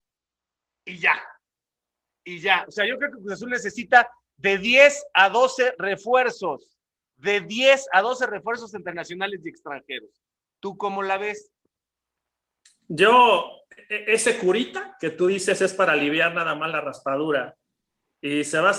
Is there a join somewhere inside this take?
no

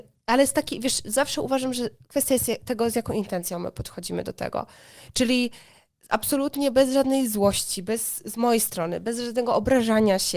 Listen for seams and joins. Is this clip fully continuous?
yes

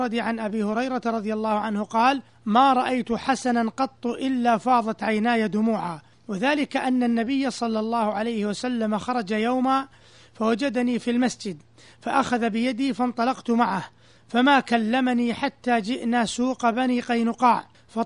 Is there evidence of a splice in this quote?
no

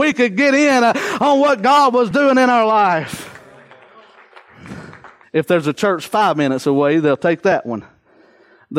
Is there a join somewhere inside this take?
yes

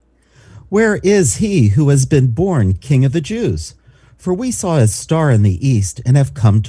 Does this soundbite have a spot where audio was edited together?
no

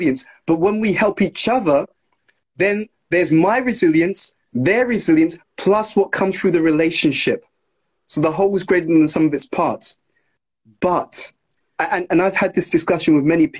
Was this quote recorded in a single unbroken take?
yes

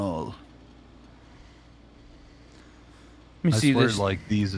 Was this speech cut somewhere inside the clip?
no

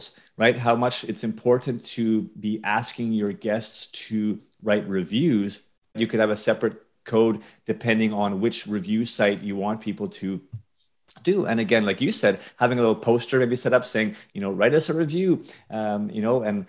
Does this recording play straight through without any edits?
no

